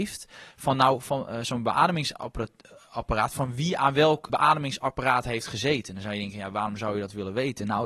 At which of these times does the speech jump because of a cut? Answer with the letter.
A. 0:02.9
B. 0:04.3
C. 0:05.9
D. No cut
B